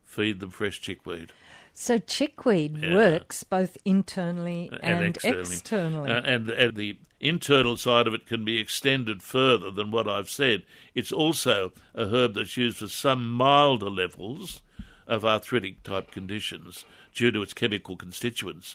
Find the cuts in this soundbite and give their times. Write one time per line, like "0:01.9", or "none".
0:06.7